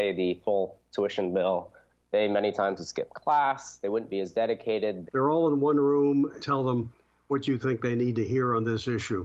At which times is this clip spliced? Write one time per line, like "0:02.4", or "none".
0:05.1
0:06.4

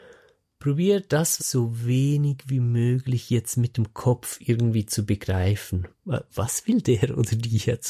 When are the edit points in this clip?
0:01.4
0:05.9

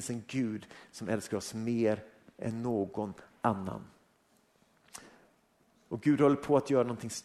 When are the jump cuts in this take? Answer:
none

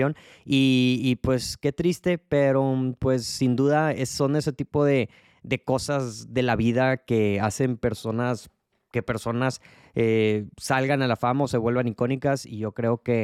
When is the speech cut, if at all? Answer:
none

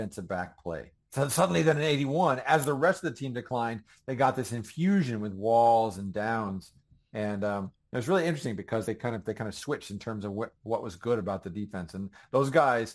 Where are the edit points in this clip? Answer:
0:01.0
0:08.8

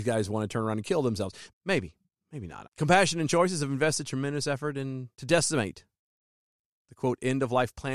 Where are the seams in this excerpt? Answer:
0:01.5
0:02.6
0:05.1

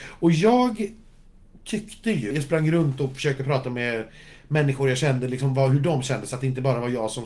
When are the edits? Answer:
0:02.3

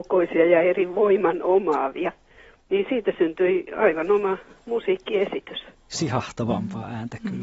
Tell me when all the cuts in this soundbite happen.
0:05.9

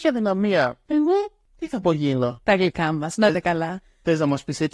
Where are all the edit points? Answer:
0:02.4

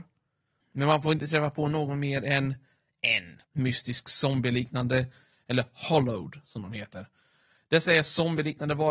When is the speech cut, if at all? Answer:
0:03.4

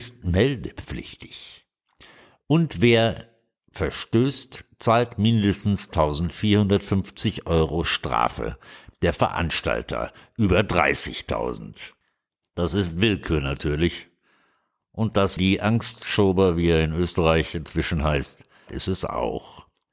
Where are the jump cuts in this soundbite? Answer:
0:15.4
0:18.7

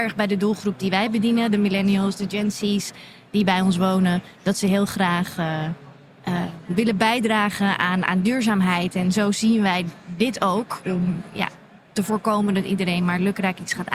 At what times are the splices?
none

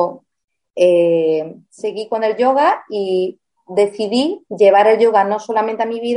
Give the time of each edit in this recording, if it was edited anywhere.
0:04.5

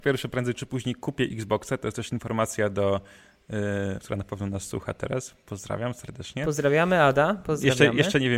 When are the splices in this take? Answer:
0:04.0

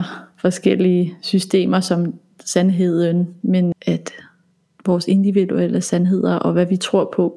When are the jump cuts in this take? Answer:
0:03.7

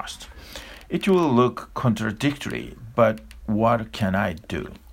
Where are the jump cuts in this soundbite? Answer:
none

